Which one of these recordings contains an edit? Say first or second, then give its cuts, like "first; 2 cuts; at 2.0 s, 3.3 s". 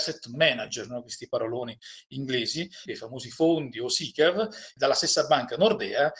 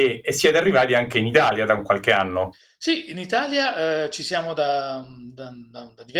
first; 2 cuts; at 2.9 s, 4.8 s